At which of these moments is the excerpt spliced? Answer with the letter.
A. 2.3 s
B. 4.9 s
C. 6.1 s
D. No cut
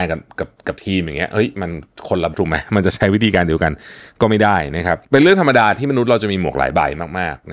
A